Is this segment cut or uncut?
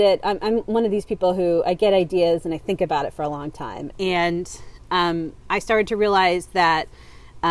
cut